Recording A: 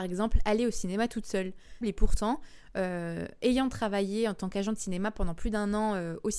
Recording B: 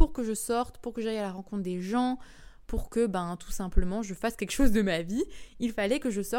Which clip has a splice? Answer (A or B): A